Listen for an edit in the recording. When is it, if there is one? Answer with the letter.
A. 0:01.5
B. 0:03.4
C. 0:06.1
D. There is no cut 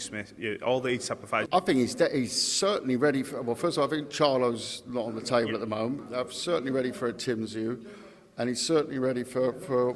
A